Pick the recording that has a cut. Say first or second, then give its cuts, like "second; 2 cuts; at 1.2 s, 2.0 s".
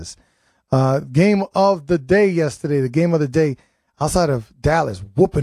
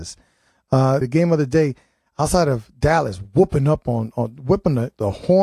second; 1 cut; at 1.0 s